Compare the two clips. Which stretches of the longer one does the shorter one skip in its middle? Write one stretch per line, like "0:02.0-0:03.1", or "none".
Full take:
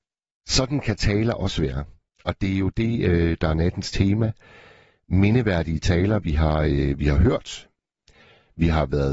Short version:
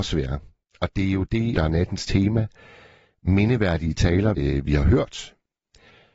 0:03.0-0:03.4
0:06.2-0:06.7